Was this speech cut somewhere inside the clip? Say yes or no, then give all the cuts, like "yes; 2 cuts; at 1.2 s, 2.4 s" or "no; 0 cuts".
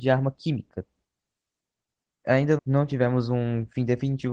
yes; 1 cut; at 2.6 s